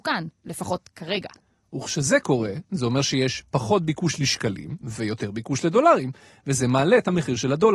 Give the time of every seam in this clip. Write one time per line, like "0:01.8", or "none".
none